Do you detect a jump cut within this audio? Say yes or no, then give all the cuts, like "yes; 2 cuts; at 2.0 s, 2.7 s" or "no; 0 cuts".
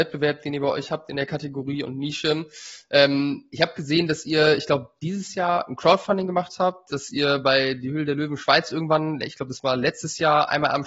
no; 0 cuts